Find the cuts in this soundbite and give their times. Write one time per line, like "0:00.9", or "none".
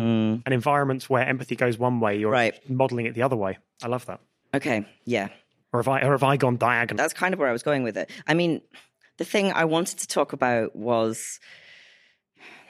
0:07.0